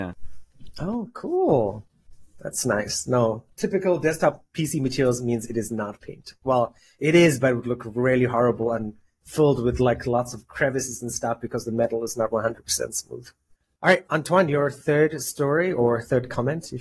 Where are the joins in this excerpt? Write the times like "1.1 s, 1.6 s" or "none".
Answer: none